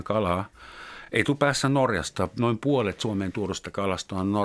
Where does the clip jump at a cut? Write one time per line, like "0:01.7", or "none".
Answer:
none